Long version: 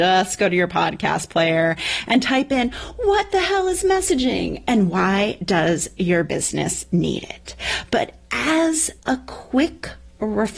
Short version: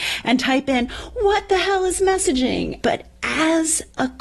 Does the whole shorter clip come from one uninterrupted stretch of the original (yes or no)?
no